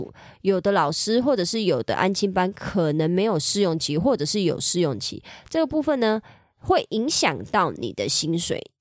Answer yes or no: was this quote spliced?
no